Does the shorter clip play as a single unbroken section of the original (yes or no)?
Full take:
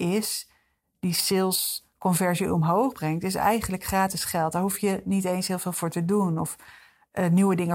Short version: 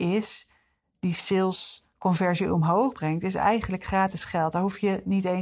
yes